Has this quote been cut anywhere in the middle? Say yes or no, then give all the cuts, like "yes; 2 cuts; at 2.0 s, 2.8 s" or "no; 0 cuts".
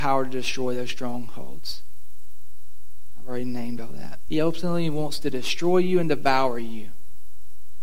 yes; 1 cut; at 4.3 s